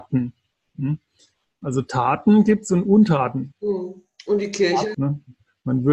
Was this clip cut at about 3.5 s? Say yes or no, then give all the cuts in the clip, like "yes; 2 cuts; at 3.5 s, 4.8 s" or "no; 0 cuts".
yes; 2 cuts; at 3.5 s, 4.9 s